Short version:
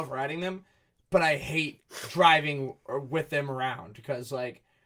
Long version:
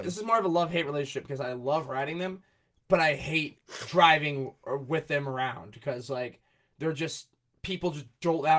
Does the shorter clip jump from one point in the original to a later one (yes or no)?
no